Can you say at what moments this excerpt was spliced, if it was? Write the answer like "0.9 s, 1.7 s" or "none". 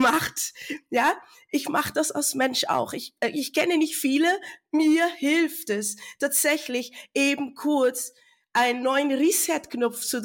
none